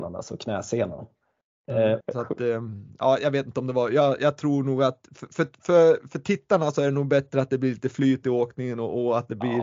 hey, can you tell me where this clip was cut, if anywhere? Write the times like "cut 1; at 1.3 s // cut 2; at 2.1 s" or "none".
cut 1; at 2.0 s